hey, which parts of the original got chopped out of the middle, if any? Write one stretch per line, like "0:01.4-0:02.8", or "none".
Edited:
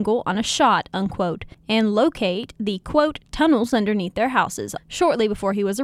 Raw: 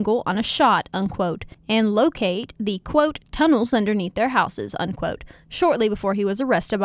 0:04.8-0:05.4